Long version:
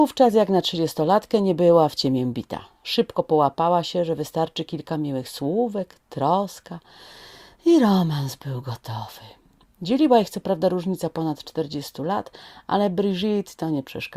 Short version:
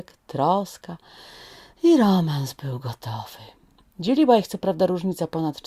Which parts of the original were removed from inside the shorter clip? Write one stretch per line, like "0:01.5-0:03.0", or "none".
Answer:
none